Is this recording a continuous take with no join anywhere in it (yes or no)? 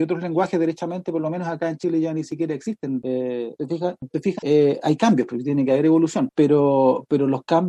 no